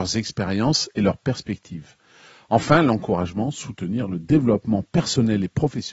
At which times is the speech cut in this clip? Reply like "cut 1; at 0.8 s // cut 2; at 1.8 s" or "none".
none